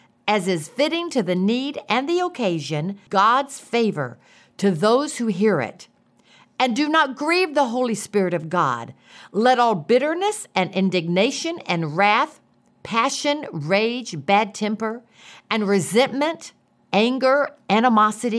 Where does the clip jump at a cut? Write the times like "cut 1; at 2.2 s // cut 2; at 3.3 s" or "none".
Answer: cut 1; at 3.1 s